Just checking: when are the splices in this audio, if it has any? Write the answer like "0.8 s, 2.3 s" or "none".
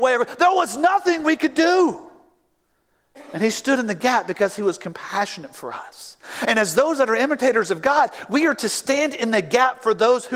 none